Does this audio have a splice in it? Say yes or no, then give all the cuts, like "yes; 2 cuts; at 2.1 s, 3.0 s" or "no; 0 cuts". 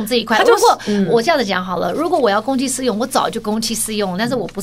no; 0 cuts